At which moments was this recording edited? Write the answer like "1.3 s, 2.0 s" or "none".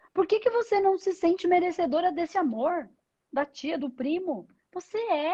3.8 s